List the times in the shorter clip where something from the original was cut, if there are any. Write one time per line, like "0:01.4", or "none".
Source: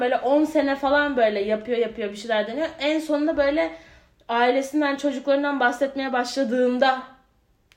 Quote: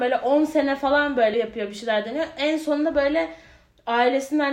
0:01.3